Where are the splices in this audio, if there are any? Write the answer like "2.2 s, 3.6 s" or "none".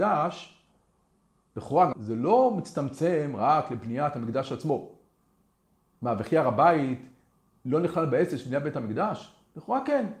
1.9 s